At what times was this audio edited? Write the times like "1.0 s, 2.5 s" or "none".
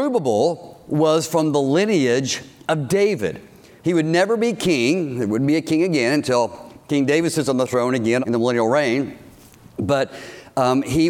8.2 s